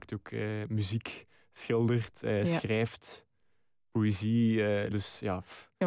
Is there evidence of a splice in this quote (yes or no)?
yes